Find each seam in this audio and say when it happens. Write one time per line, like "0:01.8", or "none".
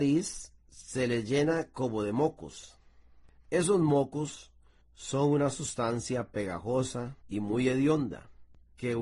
0:07.2